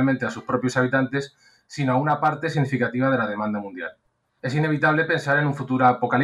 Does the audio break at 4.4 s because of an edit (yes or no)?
yes